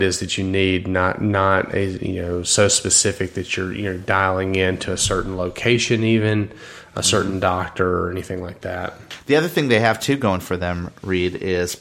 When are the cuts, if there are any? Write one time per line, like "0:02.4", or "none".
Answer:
none

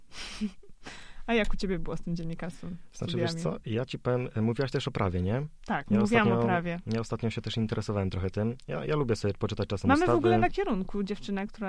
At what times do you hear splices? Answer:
none

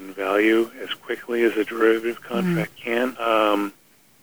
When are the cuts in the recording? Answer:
0:03.1

